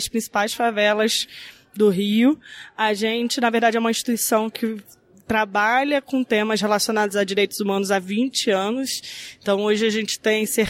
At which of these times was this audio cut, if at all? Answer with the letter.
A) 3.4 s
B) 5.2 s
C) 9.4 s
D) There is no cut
D